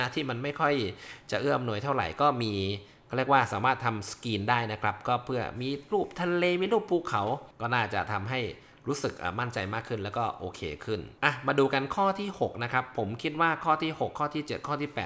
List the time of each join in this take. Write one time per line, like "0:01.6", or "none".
0:07.5
0:11.2